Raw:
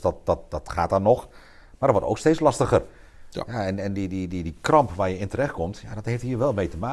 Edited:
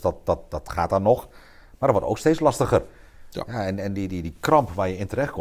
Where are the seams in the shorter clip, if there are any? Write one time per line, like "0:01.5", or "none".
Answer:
0:04.1

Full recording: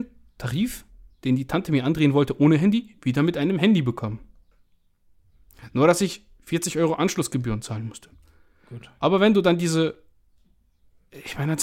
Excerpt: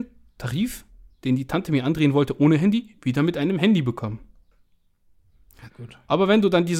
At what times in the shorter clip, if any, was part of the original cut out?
0:05.7

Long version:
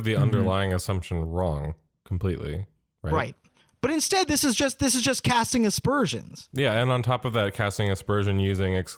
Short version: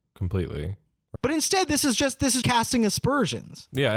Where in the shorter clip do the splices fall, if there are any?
0:01.2
0:02.4

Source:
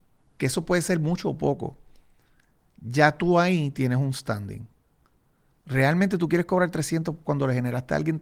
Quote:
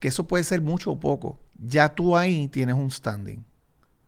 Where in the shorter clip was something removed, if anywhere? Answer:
0:01.5

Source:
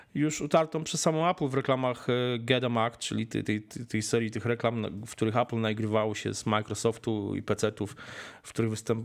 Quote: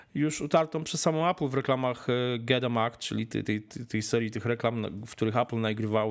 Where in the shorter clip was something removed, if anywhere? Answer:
none

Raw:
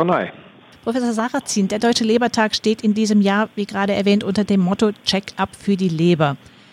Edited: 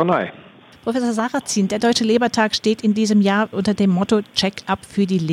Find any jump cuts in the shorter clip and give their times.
0:03.5

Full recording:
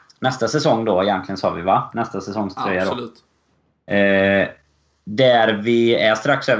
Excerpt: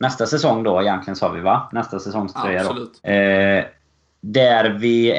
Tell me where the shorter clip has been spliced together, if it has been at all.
0:03.0

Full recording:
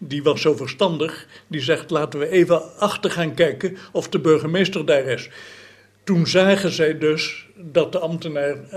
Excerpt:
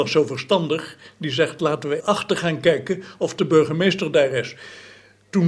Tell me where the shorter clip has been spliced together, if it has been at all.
0:02.0

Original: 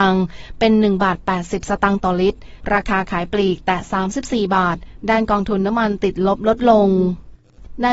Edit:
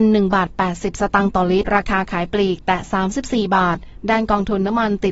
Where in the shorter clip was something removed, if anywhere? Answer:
0:01.7

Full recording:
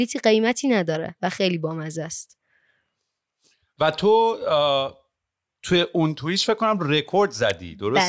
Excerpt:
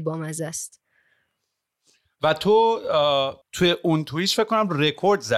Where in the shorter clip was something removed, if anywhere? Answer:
0:03.4

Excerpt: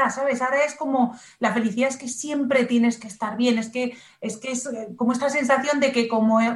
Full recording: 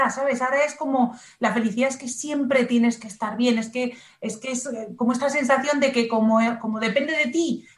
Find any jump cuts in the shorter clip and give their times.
none

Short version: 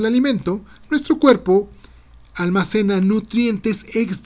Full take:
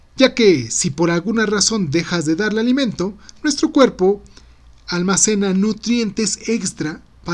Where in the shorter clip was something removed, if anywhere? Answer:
none

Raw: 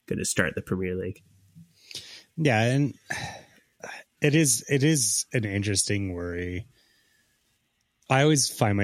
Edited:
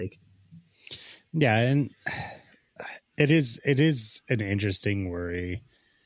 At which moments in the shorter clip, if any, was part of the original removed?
none

